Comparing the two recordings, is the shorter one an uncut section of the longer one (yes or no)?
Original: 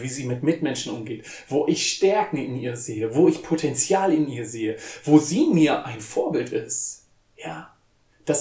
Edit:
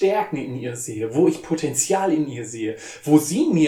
yes